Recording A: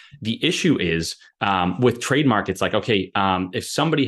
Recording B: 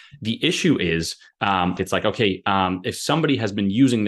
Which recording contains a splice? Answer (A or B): B